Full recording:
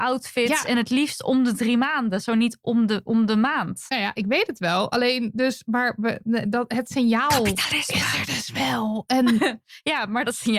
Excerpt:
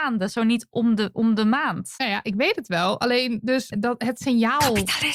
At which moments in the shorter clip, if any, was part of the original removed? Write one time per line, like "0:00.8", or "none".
0:03.7